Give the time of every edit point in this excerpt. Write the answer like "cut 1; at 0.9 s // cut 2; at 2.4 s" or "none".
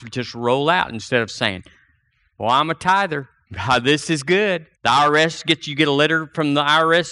cut 1; at 4.7 s